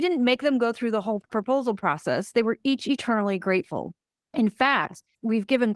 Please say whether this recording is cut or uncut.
uncut